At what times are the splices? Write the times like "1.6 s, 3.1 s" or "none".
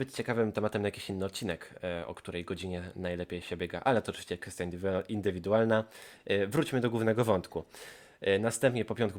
none